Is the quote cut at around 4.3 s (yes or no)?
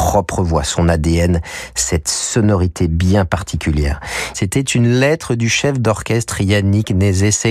yes